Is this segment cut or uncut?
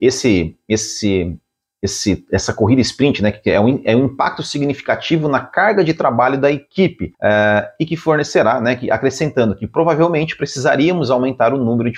cut